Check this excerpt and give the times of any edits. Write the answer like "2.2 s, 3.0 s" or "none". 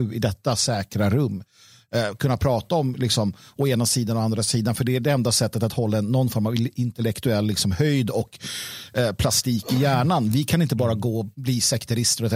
none